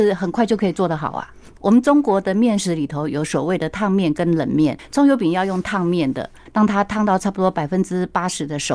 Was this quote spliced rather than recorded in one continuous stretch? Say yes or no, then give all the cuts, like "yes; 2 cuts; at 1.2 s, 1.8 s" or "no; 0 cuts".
yes; 2 cuts; at 1.6 s, 6.5 s